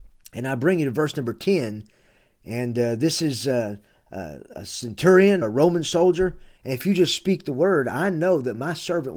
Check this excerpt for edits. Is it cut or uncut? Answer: cut